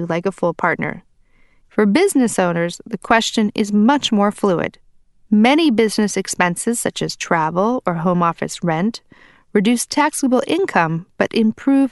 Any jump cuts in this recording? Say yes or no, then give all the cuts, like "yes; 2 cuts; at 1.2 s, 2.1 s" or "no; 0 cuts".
yes; 1 cut; at 1.6 s